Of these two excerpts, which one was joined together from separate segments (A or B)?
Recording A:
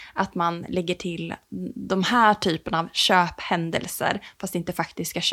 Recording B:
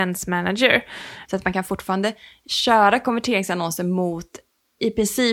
B